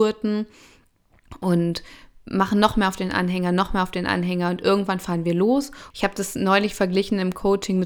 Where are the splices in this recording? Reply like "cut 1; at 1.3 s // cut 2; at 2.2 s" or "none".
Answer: cut 1; at 5.9 s